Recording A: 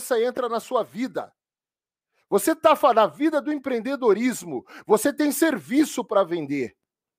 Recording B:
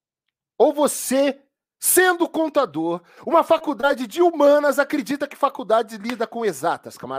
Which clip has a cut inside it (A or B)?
B